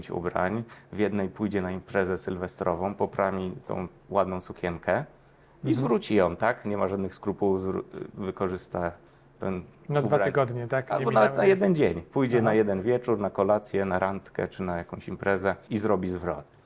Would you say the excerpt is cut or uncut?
cut